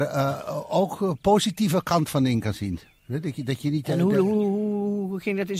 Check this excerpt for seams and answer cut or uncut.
uncut